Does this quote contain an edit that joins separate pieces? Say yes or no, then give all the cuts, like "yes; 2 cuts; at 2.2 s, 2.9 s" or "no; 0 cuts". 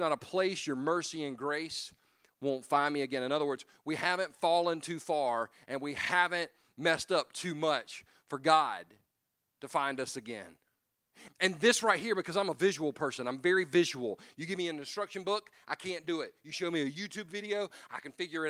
yes; 1 cut; at 11.3 s